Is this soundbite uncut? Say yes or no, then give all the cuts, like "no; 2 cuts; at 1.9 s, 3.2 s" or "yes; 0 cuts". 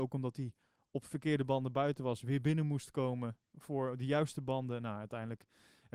yes; 0 cuts